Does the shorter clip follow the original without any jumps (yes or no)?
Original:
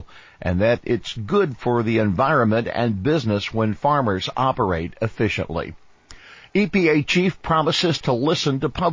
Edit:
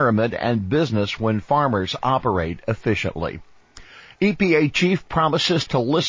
yes